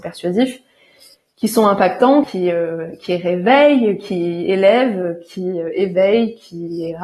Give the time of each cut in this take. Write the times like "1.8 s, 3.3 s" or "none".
2.2 s